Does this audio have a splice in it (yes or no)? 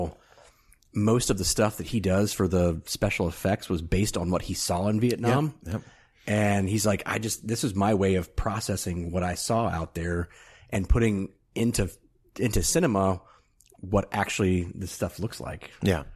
no